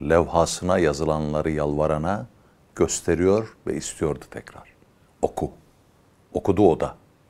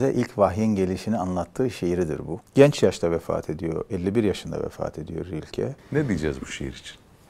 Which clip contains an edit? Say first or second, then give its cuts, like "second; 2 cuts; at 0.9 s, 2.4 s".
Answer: second; 2 cuts; at 2.4 s, 5.8 s